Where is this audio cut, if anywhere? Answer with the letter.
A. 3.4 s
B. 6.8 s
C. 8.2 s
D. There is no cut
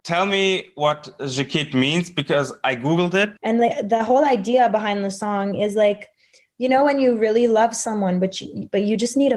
A